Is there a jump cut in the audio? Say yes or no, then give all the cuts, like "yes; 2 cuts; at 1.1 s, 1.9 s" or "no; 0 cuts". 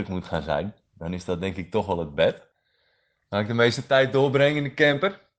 no; 0 cuts